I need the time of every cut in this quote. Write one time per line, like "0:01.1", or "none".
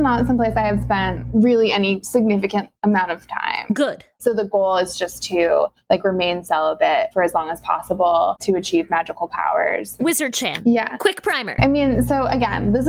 0:04.2
0:10.0